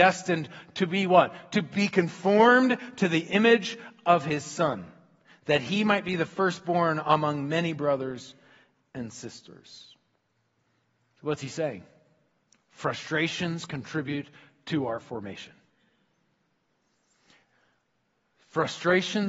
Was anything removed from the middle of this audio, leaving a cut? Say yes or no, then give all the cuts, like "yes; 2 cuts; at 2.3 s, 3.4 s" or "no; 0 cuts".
no; 0 cuts